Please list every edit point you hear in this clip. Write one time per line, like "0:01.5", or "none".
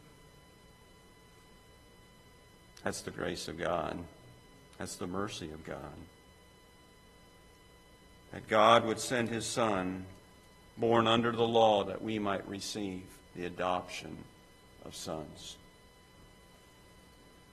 0:10.7
0:11.8
0:13.2